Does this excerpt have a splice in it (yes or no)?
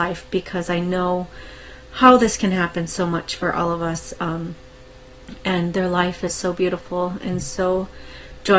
no